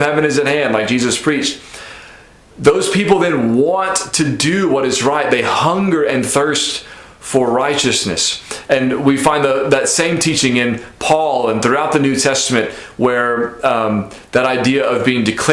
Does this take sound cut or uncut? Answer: uncut